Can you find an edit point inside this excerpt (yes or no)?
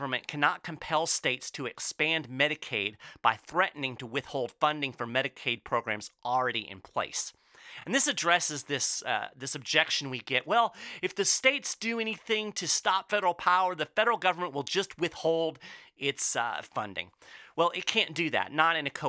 no